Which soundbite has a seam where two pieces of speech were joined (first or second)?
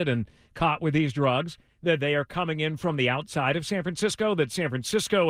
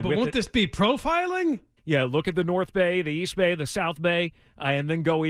second